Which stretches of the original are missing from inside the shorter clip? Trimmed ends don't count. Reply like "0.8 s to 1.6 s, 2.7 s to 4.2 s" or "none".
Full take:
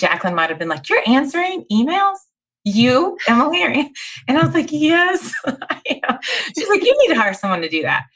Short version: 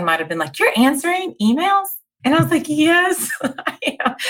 2.5 s to 4.2 s